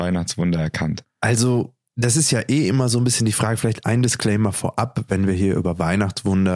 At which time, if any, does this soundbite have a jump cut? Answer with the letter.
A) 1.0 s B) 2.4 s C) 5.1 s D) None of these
A